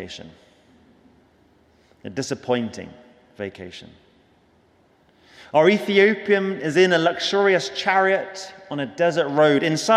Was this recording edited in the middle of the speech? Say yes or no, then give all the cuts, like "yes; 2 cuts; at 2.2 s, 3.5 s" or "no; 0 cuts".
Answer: no; 0 cuts